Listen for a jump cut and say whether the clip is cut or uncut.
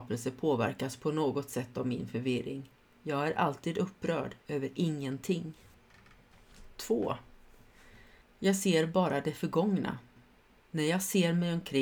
uncut